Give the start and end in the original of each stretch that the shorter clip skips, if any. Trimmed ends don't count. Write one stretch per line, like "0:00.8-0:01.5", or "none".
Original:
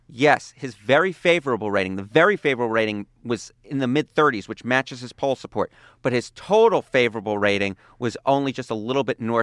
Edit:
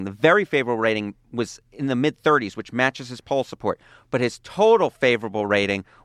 none